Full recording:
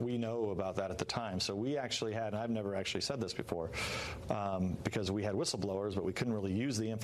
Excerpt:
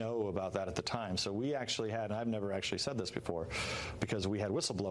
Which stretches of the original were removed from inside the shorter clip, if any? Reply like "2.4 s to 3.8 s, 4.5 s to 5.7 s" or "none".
4.2 s to 4.8 s